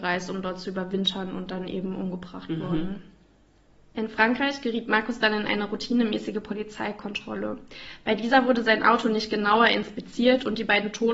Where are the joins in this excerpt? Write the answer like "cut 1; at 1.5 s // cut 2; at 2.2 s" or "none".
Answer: none